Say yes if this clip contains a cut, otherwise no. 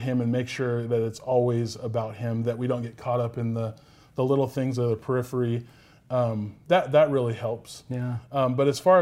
no